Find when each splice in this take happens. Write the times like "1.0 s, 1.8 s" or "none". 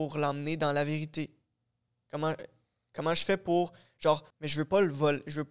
4.3 s